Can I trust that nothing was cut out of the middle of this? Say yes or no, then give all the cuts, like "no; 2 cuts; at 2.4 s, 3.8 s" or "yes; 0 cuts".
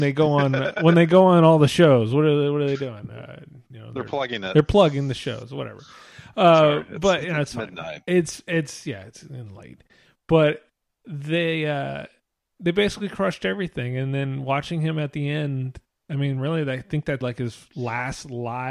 no; 1 cut; at 17.2 s